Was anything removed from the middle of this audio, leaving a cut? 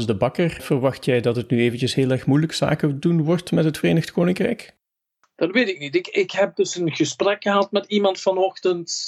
no; 0 cuts

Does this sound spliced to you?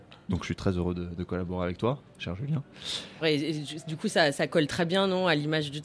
yes; 1 cut; at 3.2 s

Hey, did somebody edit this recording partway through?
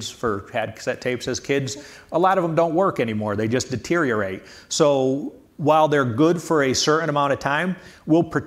no; 0 cuts

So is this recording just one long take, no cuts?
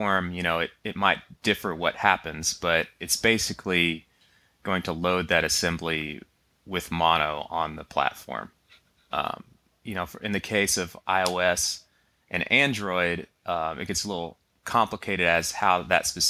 no; 1 cut; at 9.7 s

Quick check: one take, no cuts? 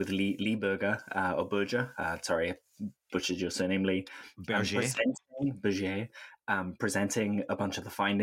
yes; 0 cuts

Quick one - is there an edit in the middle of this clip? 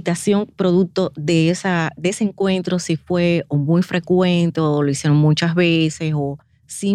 no; 0 cuts

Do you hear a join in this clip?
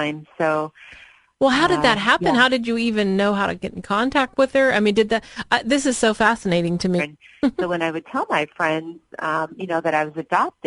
yes; 1 cut; at 7.0 s

